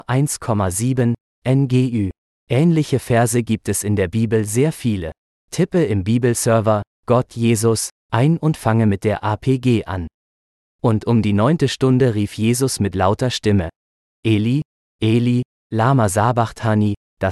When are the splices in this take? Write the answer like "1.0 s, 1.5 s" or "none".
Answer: none